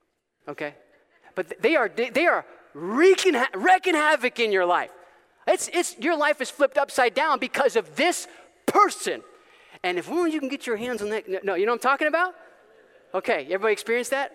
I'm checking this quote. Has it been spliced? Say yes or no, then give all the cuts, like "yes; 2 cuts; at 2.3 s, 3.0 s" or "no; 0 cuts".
no; 0 cuts